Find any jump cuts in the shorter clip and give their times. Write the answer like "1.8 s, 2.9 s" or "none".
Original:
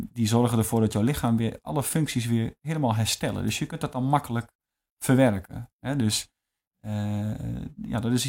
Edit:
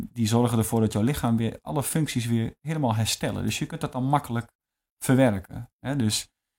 none